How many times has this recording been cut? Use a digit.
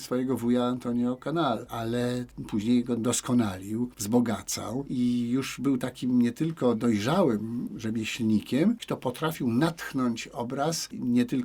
1